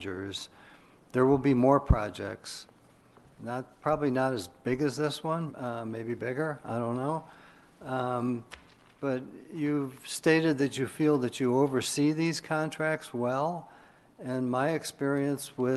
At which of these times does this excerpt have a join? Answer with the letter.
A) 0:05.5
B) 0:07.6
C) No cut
A